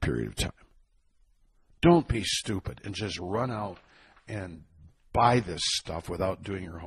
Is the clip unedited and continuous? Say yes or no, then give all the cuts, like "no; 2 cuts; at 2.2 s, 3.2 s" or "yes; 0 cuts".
yes; 0 cuts